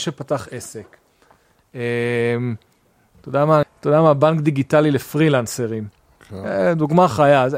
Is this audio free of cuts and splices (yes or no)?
no